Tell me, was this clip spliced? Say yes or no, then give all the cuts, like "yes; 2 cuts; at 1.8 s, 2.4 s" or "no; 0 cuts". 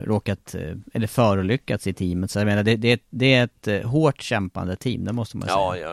no; 0 cuts